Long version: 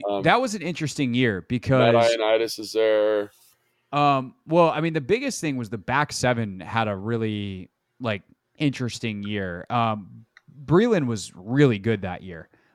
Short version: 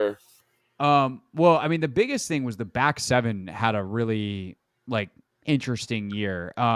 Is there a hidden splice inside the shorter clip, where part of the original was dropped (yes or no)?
no